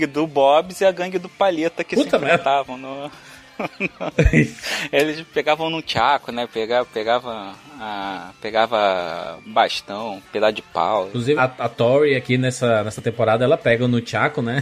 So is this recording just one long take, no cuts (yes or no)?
no